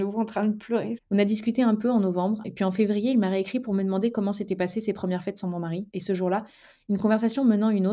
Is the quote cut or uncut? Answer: cut